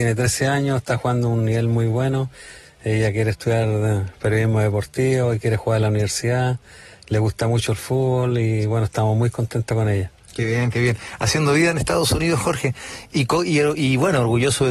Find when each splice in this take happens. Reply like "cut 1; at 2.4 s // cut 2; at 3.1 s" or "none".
none